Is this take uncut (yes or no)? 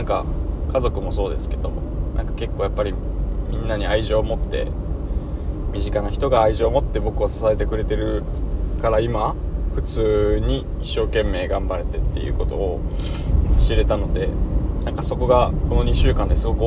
yes